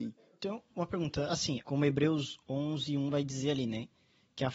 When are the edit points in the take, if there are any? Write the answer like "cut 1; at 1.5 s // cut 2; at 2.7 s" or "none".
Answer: cut 1; at 1.6 s